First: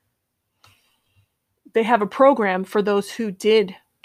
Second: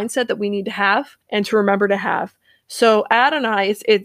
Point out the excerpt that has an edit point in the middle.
second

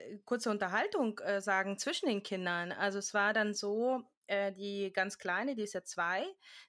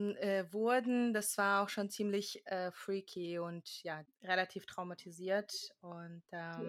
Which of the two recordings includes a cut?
second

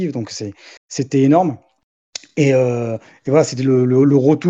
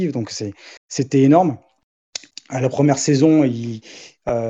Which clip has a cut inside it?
second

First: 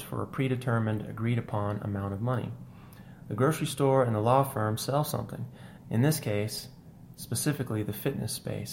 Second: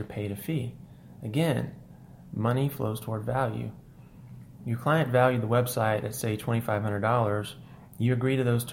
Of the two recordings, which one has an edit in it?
first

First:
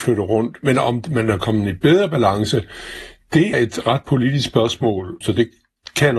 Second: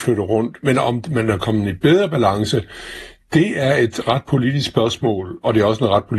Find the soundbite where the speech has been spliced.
first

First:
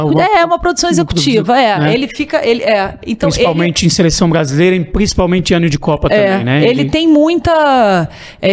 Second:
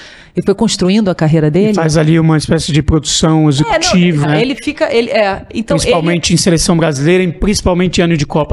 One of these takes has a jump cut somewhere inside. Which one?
second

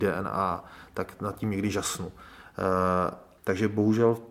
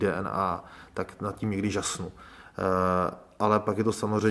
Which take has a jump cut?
first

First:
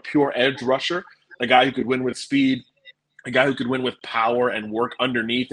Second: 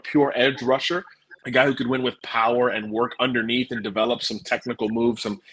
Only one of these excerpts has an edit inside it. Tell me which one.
second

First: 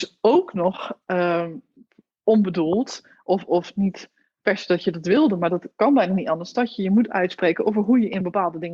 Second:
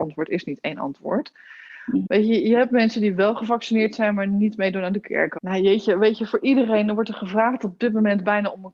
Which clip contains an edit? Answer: second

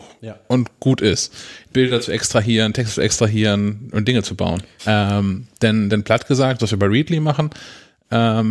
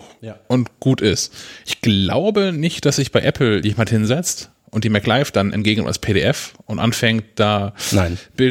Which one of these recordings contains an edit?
first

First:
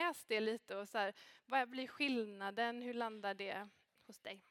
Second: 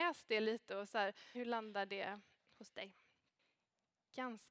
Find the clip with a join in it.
second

